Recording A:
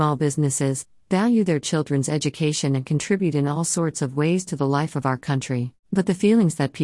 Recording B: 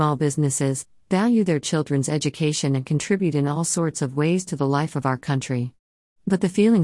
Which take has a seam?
A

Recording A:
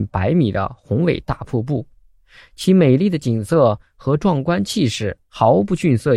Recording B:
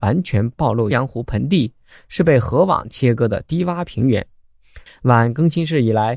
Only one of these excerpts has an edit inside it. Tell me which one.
B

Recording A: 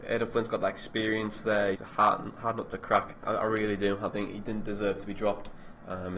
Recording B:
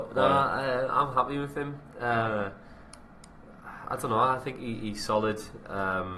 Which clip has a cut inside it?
A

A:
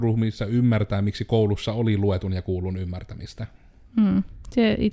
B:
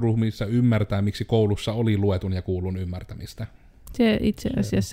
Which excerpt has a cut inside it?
B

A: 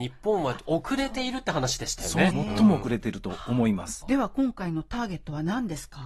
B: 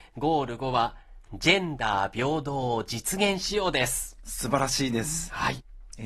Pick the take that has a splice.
A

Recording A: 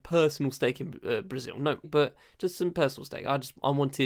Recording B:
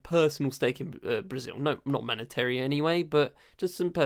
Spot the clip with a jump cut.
A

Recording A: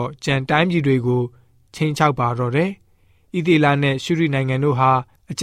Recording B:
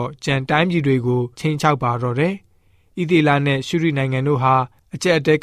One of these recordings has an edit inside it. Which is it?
B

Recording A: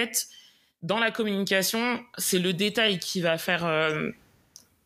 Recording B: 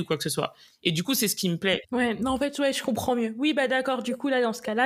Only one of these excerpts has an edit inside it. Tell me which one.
B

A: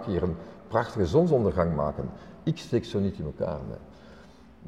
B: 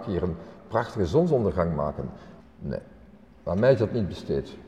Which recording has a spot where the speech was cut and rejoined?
B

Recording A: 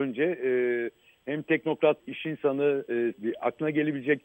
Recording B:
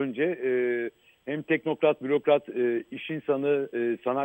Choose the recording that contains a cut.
A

